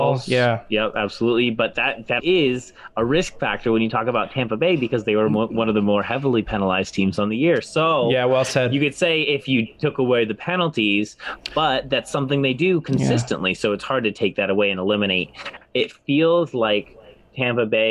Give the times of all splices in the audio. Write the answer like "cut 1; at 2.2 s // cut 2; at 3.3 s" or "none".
cut 1; at 2.2 s